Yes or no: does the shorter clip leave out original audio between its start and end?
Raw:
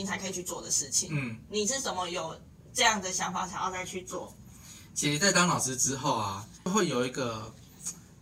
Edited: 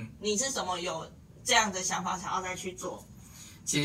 no